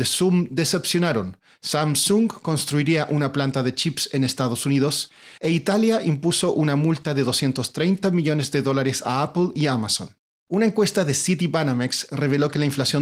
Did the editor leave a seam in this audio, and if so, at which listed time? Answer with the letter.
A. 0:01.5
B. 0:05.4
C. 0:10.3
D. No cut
B